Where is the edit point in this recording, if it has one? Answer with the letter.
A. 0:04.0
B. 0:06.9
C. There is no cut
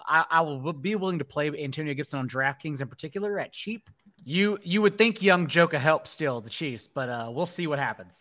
A